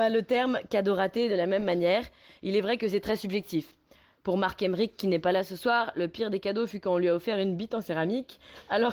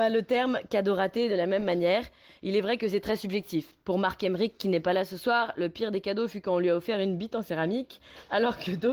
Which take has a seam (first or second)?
second